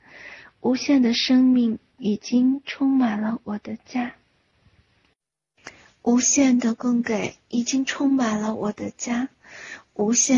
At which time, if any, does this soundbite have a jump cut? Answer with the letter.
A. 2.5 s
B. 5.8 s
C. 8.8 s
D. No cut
D